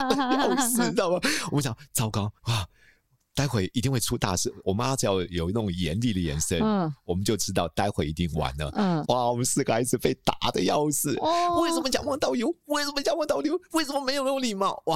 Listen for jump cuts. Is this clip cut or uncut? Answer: cut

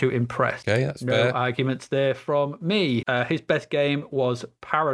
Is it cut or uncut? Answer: cut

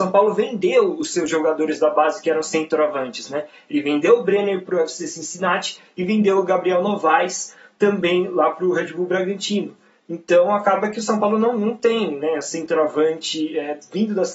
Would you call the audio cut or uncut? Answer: uncut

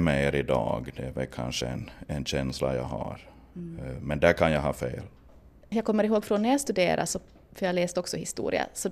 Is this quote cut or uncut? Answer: uncut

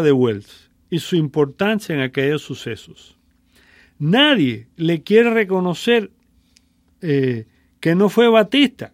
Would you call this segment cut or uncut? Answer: uncut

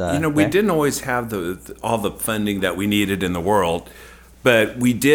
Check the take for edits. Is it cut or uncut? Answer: uncut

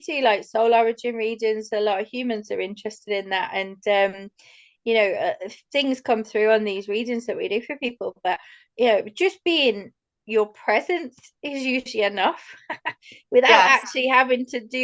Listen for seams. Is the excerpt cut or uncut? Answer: uncut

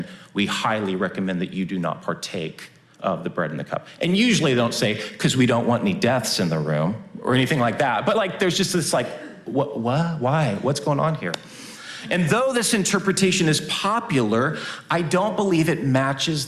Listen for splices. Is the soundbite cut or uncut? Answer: uncut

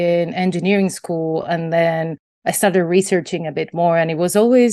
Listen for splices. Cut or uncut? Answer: uncut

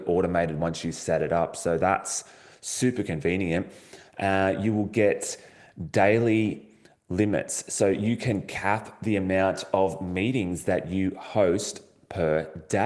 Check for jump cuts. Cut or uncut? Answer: uncut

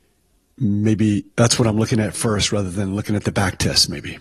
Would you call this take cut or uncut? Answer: cut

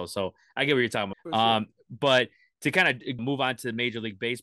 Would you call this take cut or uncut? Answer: cut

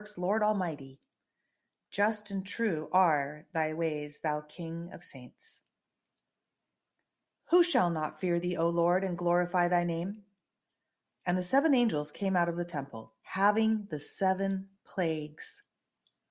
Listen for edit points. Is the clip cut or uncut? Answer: cut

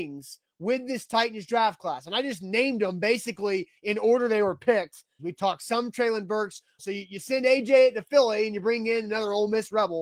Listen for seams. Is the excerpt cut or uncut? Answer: cut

